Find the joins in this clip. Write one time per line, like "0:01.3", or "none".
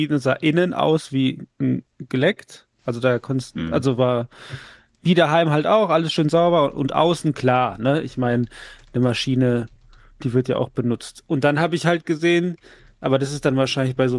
none